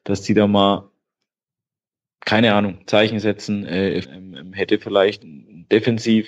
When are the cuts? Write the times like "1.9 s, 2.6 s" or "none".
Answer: 4.0 s, 5.2 s